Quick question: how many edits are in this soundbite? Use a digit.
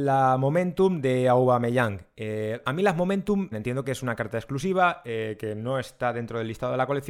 1